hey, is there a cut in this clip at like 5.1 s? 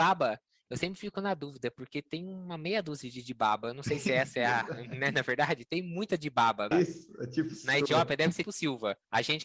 no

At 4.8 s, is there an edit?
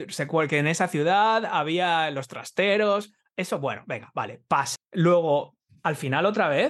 yes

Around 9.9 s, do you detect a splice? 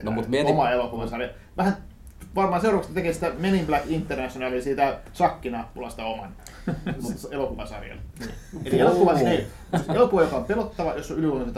no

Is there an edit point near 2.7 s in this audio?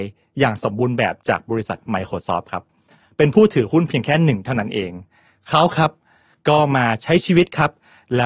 no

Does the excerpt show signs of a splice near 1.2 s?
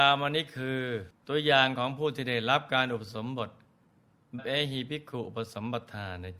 yes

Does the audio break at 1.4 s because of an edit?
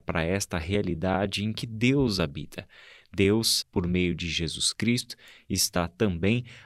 no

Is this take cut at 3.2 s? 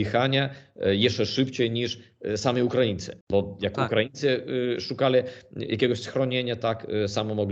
yes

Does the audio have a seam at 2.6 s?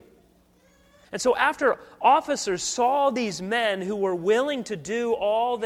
no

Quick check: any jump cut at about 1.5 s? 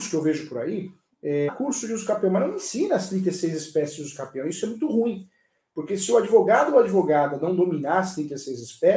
yes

